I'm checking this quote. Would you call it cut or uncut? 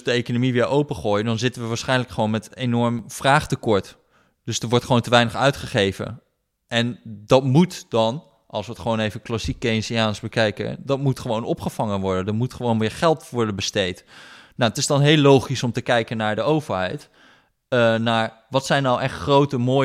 uncut